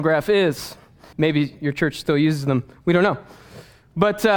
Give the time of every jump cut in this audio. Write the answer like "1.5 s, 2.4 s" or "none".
1.1 s

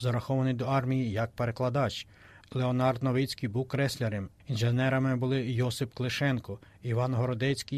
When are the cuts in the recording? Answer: 2.4 s

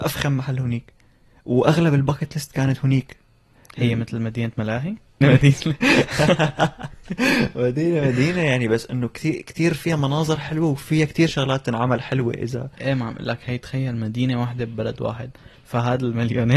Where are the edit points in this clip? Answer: 5.2 s

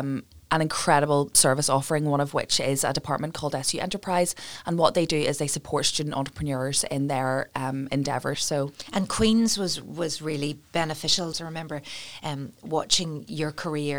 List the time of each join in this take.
8.3 s, 11.3 s

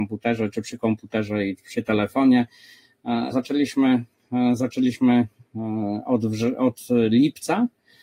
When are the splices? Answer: 3.3 s

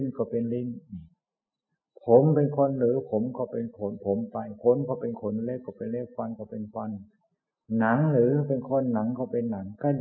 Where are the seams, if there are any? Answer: none

